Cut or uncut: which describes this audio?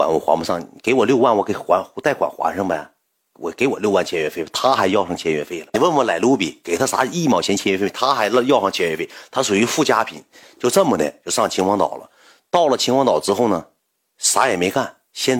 uncut